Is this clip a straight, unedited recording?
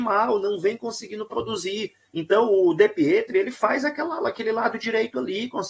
yes; 0 cuts

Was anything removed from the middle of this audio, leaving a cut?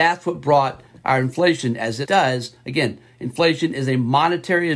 yes; 1 cut; at 2.1 s

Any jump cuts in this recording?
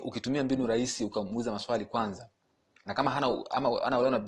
yes; 1 cut; at 2.9 s

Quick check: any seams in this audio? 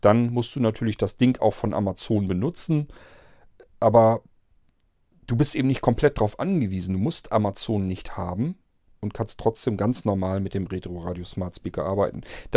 no; 0 cuts

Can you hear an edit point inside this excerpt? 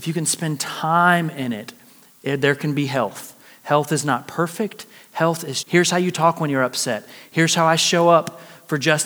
yes; 1 cut; at 5.6 s

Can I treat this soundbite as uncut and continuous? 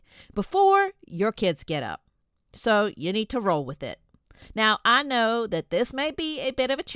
yes; 0 cuts

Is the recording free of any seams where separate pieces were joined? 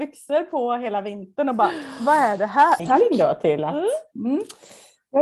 no; 1 cut; at 2.8 s

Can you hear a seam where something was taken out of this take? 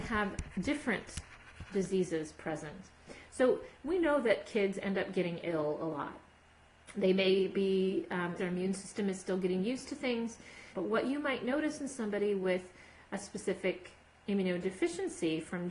yes; 2 cuts; at 8.4 s, 10.7 s

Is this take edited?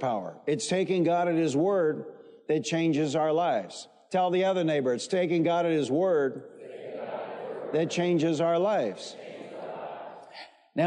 no; 0 cuts

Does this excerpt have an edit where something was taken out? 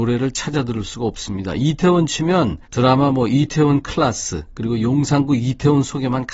yes; 1 cut; at 2.6 s

